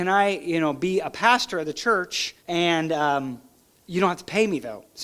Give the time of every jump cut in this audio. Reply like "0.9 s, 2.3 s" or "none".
2.4 s